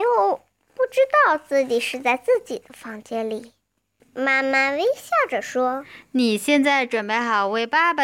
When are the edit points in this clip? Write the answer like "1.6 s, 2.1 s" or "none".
4.0 s